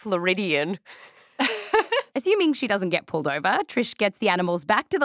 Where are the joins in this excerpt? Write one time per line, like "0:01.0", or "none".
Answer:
0:02.1